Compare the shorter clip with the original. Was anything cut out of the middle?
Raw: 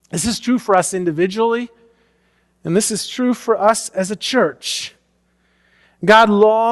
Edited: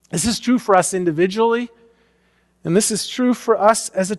no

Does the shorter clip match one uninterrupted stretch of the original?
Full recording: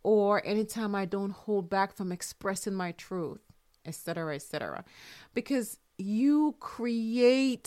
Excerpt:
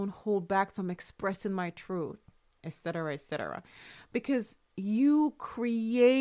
yes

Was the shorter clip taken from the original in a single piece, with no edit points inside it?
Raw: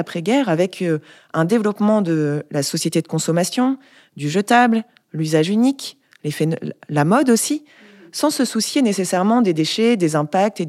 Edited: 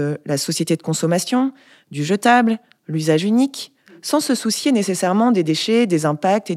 no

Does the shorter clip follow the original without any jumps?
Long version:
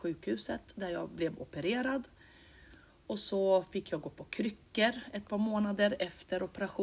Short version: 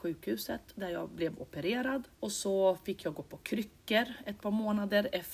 no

